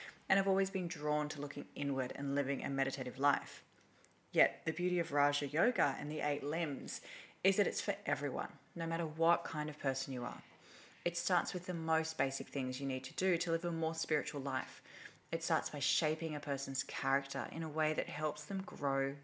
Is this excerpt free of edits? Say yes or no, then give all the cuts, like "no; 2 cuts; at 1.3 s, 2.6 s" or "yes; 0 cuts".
yes; 0 cuts